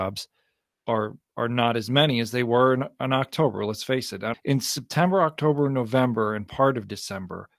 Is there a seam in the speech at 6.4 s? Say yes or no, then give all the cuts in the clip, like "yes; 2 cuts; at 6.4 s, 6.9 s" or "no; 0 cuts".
no; 1 cut; at 4.3 s